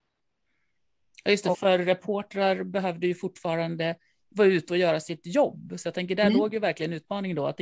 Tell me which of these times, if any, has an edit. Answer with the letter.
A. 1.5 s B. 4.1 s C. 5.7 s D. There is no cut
A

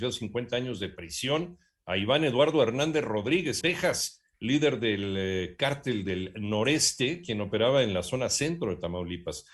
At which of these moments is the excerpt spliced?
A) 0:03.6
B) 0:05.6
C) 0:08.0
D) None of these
A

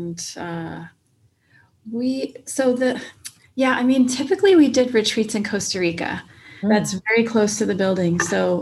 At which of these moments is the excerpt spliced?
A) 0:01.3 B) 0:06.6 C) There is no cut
B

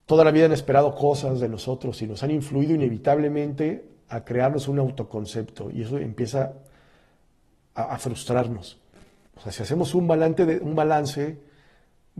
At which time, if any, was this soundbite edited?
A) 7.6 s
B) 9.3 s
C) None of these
B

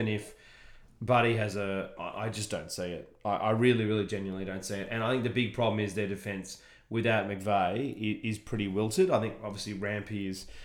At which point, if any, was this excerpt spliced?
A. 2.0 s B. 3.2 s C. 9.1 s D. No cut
A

